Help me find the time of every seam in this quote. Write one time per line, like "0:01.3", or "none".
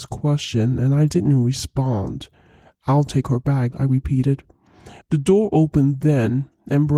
0:03.7
0:05.0